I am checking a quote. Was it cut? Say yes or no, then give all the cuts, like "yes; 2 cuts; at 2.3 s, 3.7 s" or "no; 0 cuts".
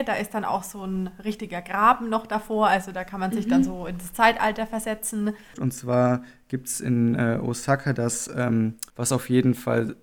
yes; 2 cuts; at 5.5 s, 8.9 s